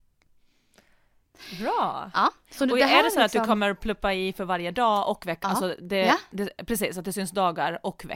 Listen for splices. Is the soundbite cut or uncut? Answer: uncut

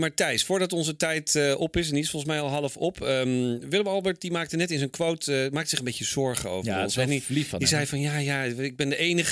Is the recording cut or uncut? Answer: uncut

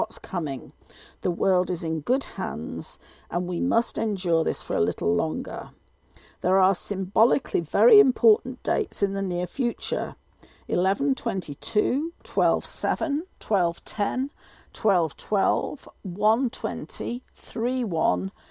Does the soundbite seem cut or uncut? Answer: uncut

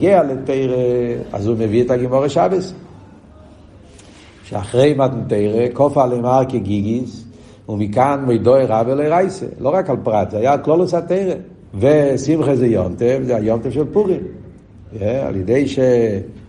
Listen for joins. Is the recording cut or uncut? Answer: cut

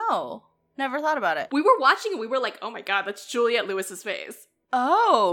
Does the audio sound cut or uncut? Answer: cut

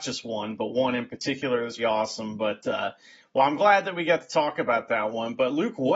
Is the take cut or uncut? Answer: cut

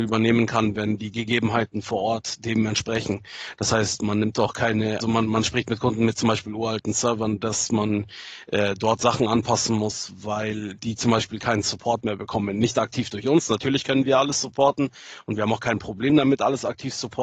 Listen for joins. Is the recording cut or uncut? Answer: cut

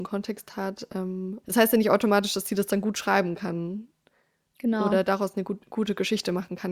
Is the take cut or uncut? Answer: cut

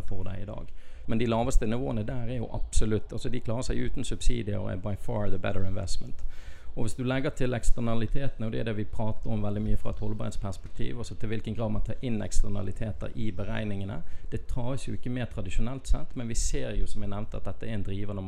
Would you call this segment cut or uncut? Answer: cut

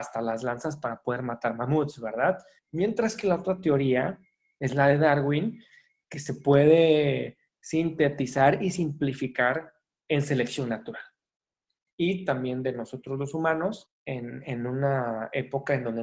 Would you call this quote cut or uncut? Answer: cut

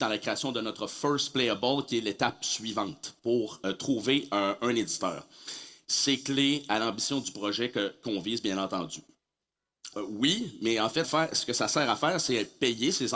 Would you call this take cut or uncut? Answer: cut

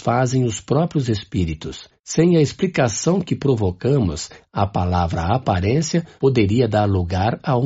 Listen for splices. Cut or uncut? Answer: cut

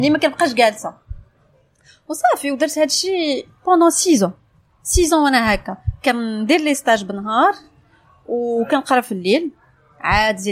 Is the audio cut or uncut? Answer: uncut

